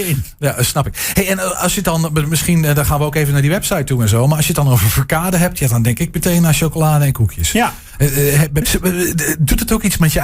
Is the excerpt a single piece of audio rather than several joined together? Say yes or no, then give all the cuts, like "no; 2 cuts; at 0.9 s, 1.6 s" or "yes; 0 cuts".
no; 1 cut; at 8.6 s